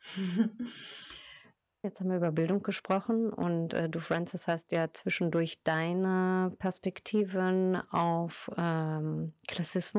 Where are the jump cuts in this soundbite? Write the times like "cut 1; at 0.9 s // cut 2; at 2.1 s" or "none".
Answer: cut 1; at 1.8 s